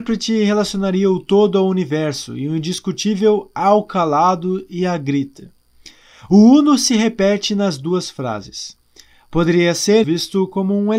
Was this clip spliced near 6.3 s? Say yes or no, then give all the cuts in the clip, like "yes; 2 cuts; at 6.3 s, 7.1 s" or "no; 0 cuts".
no; 1 cut; at 10.0 s